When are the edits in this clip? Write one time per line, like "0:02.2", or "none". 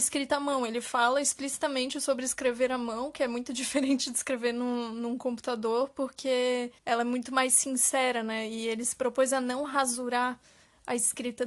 0:06.8

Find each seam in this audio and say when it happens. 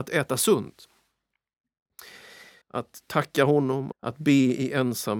0:02.6
0:03.9

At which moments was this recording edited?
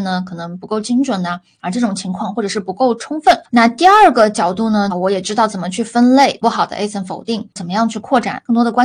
0:03.5
0:04.9
0:06.4

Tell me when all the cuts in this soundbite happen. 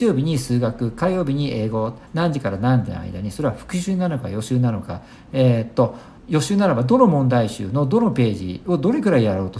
0:06.2

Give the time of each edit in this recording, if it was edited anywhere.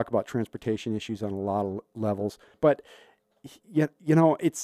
0:02.5

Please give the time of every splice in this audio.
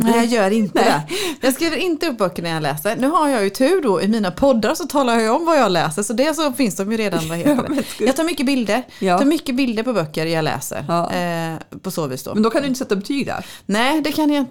none

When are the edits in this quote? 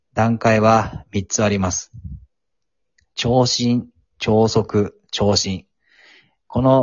none

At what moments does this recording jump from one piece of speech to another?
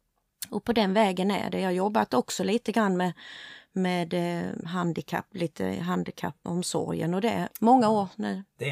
0:04.6
0:06.4
0:07.5

